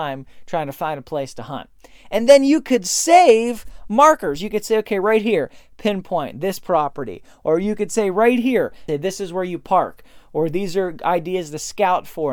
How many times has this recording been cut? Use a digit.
1